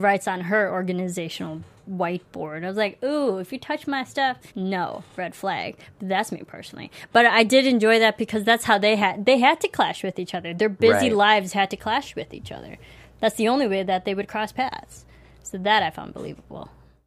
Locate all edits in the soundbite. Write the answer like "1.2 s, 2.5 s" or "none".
4.5 s